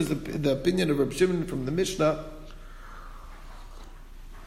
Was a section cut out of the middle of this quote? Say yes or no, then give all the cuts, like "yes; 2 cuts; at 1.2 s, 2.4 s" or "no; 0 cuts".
no; 0 cuts